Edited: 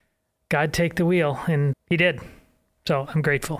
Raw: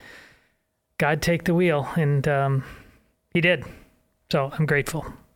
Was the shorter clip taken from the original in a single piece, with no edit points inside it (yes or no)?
no